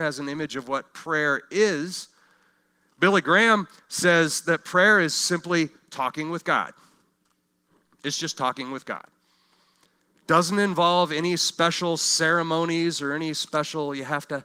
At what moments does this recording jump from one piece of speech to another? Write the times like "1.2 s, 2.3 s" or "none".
none